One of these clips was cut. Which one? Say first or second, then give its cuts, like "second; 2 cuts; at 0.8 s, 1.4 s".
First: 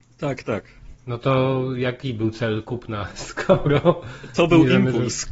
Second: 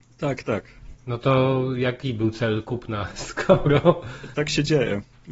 second; 1 cut; at 4.3 s